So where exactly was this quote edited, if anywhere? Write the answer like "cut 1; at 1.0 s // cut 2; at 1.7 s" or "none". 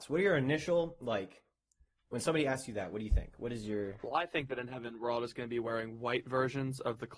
none